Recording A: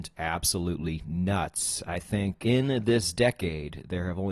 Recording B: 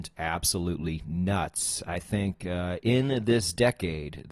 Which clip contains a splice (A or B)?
A